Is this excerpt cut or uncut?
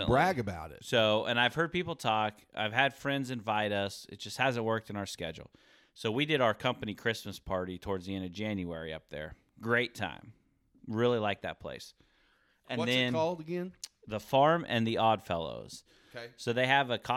uncut